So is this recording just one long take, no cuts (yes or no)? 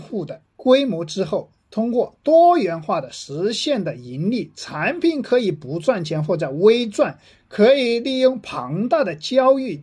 yes